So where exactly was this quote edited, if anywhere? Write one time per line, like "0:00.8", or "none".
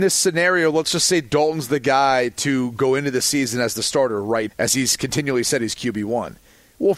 0:04.5